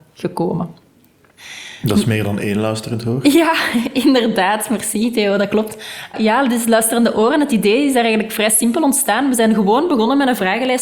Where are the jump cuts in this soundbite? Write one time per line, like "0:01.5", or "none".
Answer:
0:06.1